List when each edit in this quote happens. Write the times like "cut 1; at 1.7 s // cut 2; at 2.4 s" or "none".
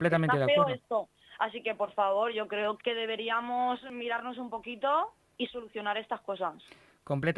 cut 1; at 2.8 s // cut 2; at 5.4 s

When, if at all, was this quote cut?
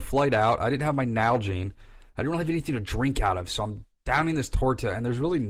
none

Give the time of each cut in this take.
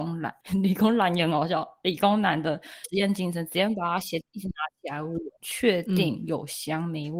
cut 1; at 5.3 s

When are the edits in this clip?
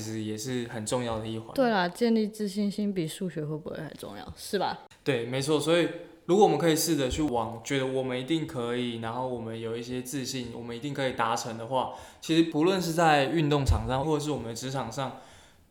cut 1; at 12.5 s // cut 2; at 14.0 s

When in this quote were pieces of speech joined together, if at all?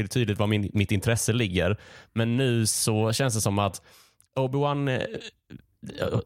none

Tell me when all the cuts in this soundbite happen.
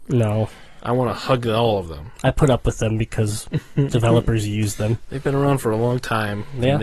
none

